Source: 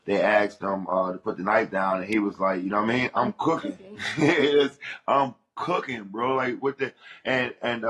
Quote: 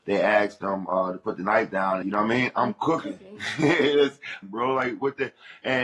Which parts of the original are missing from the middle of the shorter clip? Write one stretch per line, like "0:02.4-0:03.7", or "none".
0:02.0-0:02.6
0:05.0-0:06.0